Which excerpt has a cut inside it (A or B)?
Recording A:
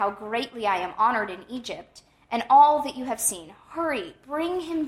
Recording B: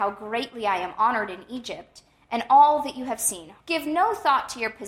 B